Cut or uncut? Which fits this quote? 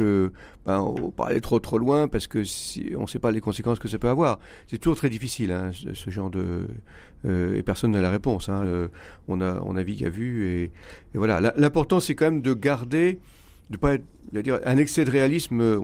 cut